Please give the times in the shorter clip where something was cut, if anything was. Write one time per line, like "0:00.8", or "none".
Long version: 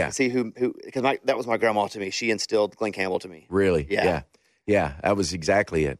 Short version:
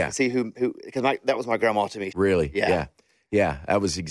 0:02.1